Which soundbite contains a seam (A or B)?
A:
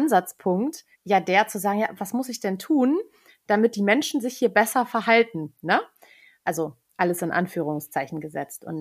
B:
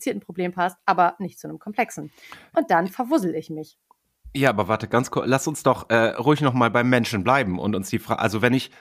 A